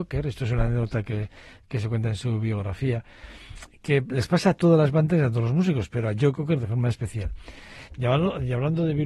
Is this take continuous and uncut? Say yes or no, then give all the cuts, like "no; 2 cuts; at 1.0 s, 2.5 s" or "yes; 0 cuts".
no; 1 cut; at 7.9 s